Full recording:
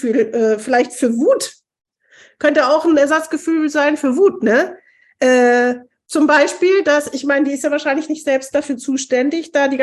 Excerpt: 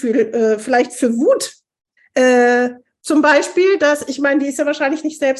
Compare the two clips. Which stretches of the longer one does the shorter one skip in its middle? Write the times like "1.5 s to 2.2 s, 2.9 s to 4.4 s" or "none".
2.0 s to 5.0 s